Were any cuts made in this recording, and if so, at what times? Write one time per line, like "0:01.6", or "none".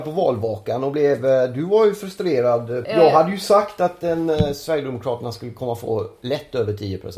0:02.8